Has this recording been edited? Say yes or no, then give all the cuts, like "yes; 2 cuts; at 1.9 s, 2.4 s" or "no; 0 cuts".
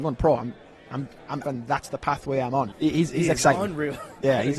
yes; 2 cuts; at 1.4 s, 2.7 s